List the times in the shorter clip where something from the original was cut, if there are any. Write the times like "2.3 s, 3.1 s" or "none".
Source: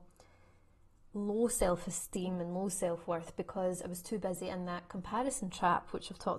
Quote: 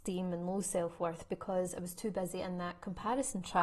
none